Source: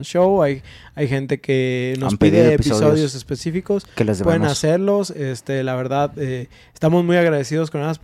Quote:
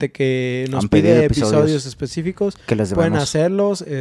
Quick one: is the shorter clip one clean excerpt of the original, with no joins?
yes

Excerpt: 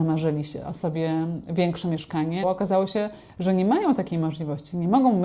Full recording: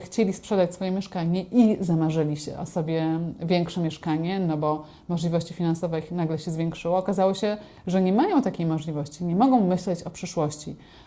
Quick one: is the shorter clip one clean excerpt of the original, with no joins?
no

